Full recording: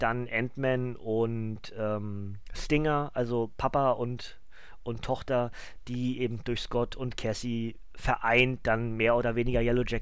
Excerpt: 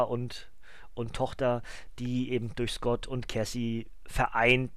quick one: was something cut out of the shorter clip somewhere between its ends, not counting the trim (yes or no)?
no